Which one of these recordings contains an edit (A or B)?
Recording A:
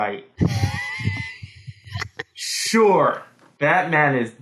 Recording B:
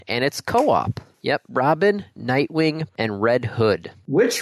B